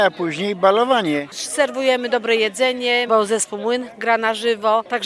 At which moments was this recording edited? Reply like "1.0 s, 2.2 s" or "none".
3.1 s